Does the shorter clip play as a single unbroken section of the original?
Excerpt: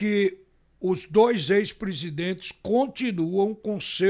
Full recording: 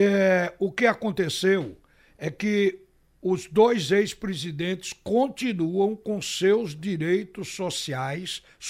yes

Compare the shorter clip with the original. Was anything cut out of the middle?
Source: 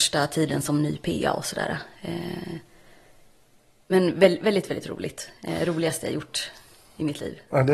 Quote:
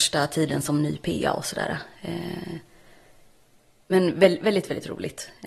no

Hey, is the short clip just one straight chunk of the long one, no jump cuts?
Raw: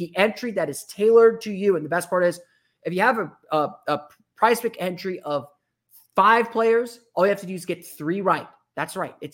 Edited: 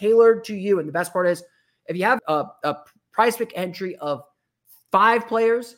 no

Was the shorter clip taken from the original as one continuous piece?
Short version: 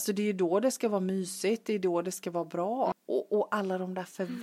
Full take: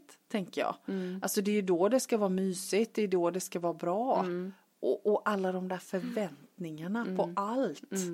no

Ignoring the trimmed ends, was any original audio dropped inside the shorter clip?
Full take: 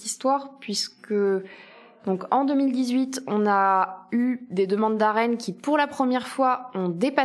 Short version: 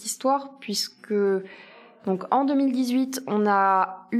no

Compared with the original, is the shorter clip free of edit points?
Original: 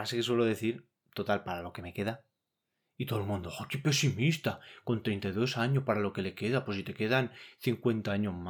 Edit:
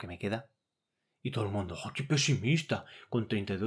yes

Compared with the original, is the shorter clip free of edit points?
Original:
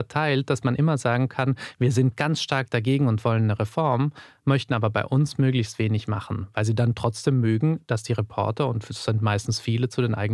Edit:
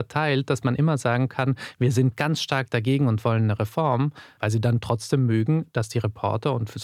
no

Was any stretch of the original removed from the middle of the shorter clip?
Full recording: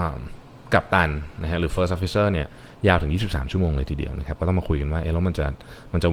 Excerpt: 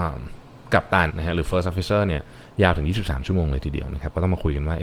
yes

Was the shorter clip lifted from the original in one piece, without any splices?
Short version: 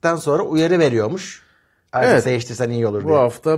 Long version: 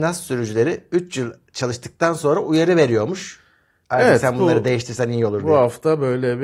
no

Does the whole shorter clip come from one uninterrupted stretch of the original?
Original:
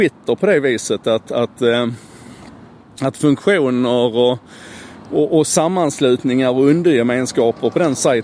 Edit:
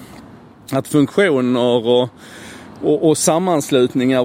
yes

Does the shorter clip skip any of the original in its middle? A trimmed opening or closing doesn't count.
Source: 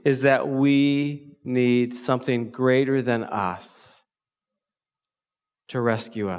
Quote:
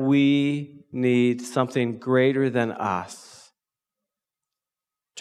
no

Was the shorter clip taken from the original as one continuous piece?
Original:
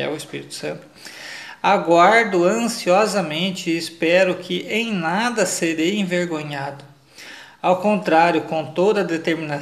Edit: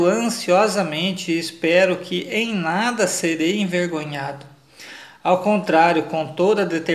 yes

